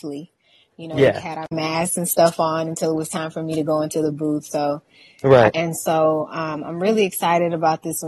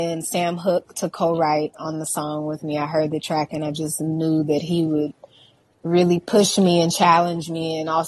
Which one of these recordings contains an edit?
first; 1 cut; at 5.5 s

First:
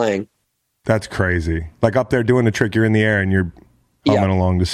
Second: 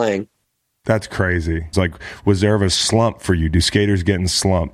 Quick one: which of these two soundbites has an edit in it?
second; 1 cut; at 1.7 s

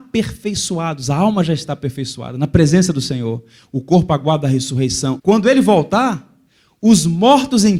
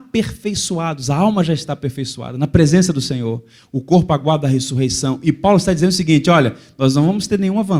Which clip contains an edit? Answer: first; 1 cut; at 5.2 s

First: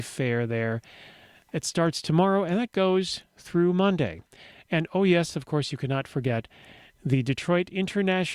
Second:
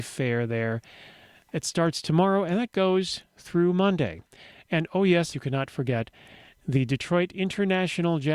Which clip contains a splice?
second; 1 cut; at 5.3 s

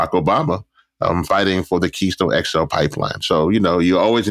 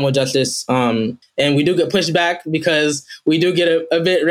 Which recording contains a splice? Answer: second; 1 cut; at 1.2 s

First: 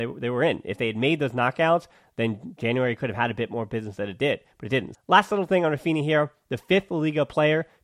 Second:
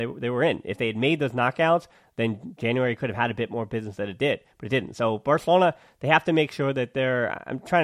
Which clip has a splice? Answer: first; 1 cut; at 4.9 s

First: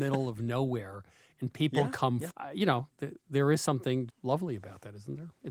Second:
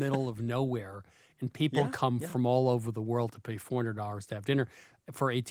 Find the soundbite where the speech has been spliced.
first; 2 cuts; at 2.3 s, 4.1 s

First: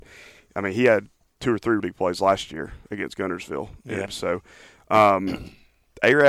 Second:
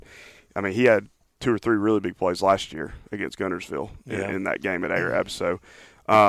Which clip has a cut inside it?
first; 2 cuts; at 1.8 s, 4.1 s

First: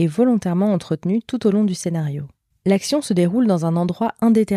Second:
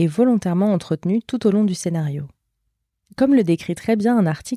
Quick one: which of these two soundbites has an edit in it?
first; 1 cut; at 2.5 s

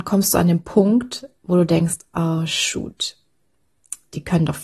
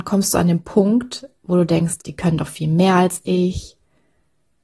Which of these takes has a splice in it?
second; 1 cut; at 2.0 s

